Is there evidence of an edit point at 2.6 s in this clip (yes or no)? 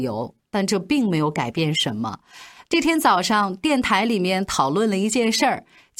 yes